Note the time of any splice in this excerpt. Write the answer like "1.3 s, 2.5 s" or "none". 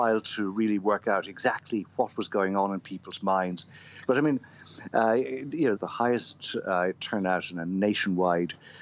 4.1 s, 5.8 s